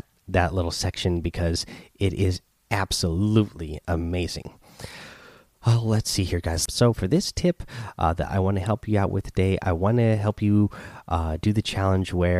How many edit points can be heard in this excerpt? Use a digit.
1